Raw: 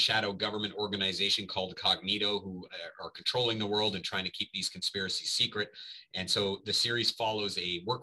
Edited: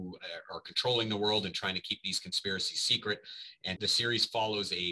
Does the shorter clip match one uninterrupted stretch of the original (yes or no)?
no